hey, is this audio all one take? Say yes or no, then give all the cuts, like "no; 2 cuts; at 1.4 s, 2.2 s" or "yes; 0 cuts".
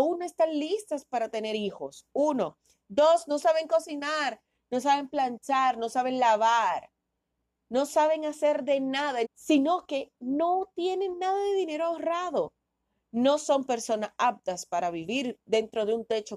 no; 1 cut; at 9.2 s